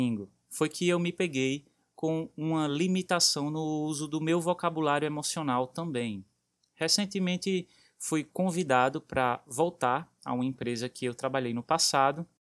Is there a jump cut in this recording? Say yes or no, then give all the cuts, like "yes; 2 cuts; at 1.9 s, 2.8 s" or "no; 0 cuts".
no; 0 cuts